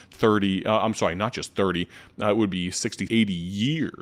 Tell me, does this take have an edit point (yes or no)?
yes